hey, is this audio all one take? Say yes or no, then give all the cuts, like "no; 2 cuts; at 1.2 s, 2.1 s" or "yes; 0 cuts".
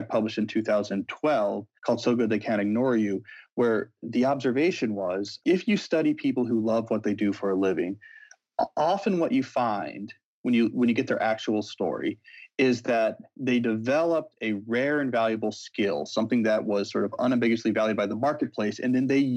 no; 2 cuts; at 1.8 s, 5.4 s